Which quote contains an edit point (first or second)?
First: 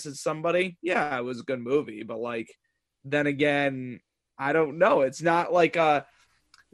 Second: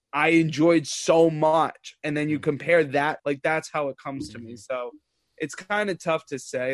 second